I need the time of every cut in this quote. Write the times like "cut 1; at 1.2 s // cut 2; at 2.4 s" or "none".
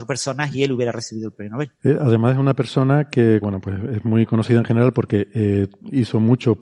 cut 1; at 1.8 s // cut 2; at 3.4 s